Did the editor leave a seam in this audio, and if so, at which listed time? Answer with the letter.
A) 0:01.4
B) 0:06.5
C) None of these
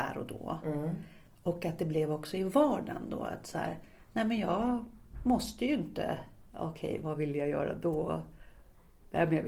B